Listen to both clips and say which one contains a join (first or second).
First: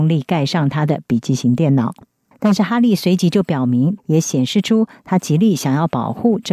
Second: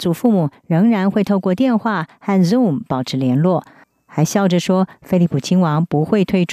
first